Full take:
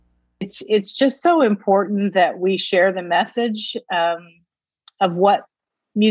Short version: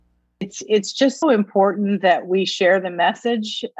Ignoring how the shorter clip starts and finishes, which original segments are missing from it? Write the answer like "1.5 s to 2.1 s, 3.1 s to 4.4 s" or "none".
1.2 s to 1.3 s